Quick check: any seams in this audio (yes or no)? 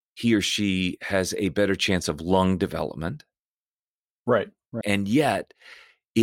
yes